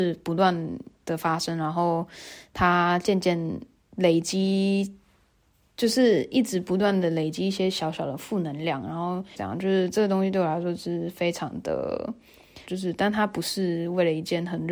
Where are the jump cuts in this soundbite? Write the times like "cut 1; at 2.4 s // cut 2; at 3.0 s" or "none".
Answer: cut 1; at 9.3 s // cut 2; at 12.7 s